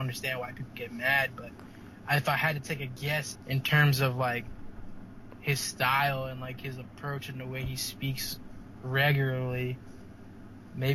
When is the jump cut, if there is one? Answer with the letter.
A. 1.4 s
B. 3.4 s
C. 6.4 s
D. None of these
B